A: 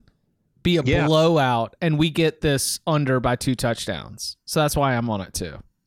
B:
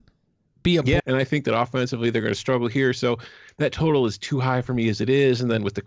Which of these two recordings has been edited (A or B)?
B